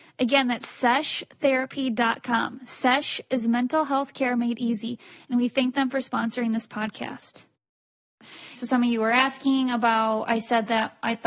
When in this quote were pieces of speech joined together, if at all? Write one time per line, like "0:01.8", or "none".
0:08.5